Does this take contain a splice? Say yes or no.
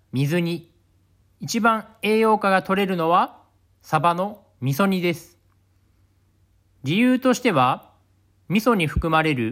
yes